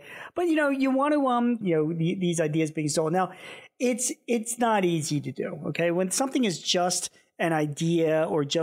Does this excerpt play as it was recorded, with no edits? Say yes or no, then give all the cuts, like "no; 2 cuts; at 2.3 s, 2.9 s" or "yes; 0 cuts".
no; 1 cut; at 1.6 s